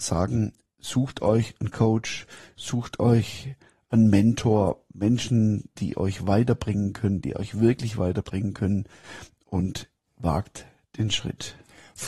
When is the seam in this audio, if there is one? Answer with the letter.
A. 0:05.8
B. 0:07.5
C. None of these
A